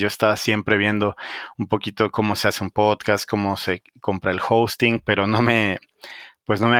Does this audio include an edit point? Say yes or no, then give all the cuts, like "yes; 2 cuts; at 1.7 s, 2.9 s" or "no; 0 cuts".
no; 0 cuts